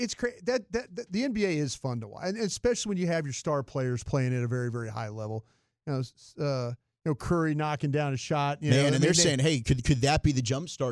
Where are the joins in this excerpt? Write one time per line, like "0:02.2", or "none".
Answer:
none